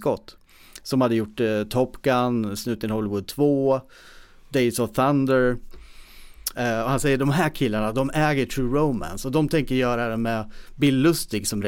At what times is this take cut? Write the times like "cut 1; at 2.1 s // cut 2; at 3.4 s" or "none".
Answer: cut 1; at 6.5 s